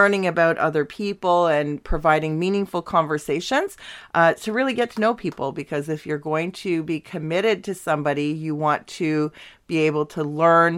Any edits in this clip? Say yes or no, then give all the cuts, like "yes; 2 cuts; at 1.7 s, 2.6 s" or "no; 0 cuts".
no; 0 cuts